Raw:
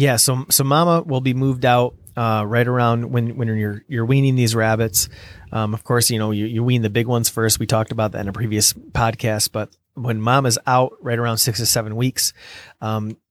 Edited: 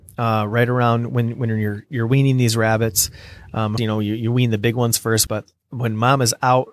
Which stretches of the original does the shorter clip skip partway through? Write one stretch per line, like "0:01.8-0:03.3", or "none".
0:05.8-0:06.1
0:07.6-0:09.5